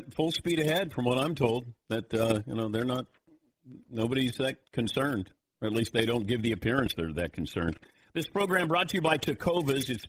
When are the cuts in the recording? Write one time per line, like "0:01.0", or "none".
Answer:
none